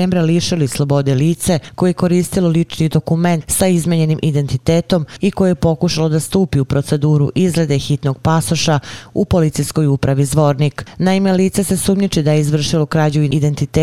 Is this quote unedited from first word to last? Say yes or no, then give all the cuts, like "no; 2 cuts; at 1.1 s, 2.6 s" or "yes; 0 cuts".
yes; 0 cuts